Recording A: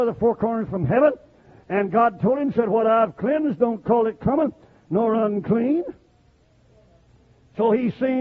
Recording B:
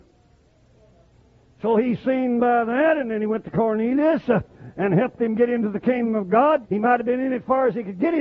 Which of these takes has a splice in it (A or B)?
B